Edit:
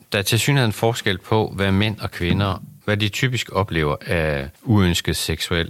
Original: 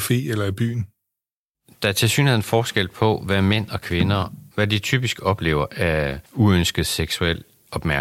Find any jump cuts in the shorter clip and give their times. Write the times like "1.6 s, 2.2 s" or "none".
none

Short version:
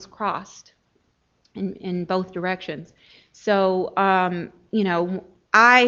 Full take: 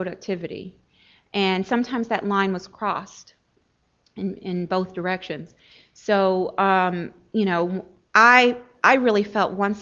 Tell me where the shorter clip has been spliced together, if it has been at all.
none

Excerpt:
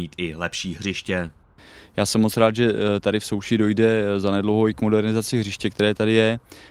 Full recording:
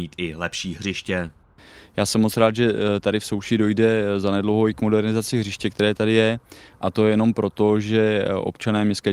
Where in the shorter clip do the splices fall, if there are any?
none

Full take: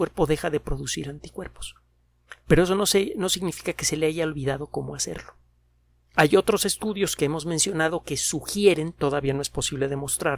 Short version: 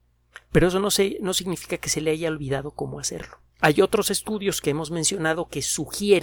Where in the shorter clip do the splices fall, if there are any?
3.5 s

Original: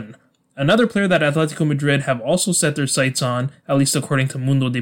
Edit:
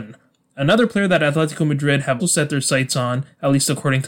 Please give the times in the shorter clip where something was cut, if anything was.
2.2 s

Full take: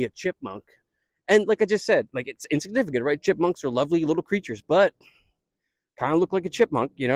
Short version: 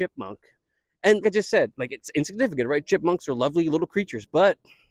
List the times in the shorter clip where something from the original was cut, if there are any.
1.2 s

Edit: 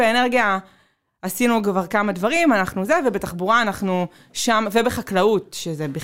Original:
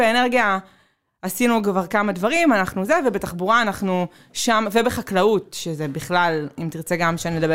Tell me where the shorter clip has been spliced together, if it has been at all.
none

